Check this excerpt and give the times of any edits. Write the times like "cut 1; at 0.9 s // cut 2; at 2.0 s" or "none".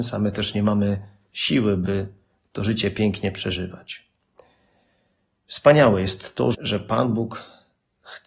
cut 1; at 6.5 s